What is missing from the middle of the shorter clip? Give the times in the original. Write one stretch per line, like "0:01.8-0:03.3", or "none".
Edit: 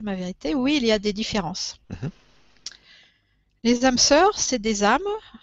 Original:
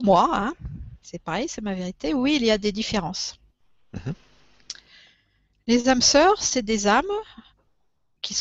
0:03.4-0:03.9